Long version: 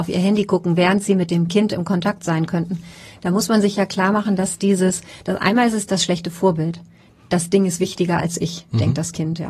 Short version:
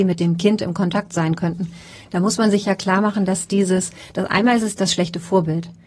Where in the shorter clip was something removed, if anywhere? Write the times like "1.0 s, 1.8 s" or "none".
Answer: none